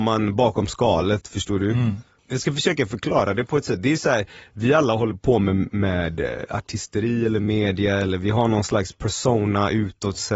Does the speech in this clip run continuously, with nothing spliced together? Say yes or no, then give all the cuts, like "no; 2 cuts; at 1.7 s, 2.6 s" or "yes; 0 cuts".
no; 1 cut; at 2.2 s